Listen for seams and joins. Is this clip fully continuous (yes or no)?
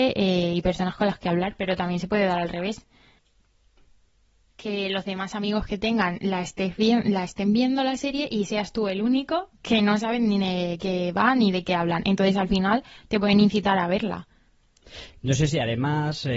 yes